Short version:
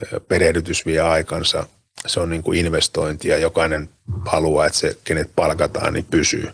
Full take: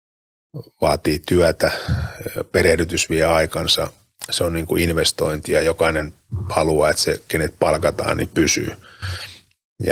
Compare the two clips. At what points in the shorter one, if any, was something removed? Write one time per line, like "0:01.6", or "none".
none